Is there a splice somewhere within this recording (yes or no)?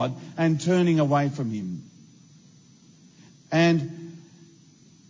yes